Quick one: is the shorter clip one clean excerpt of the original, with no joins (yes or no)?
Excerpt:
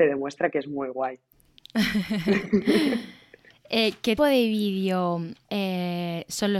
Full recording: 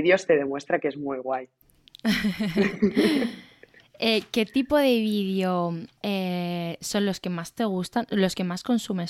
no